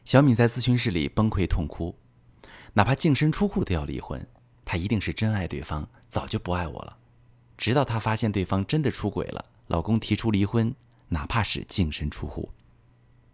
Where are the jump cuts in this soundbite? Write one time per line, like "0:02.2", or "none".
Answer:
0:07.6
0:09.6